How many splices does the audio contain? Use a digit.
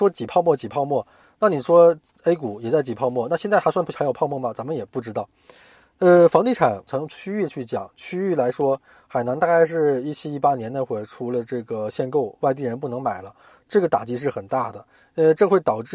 1